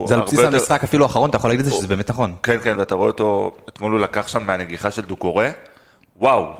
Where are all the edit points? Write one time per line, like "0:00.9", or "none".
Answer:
0:02.7